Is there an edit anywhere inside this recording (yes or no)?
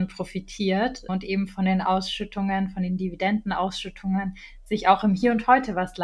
yes